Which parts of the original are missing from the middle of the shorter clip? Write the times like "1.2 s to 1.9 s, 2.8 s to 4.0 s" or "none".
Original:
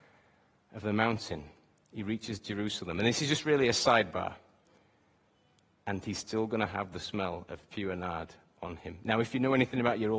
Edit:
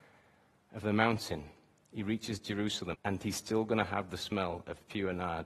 2.9 s to 5.8 s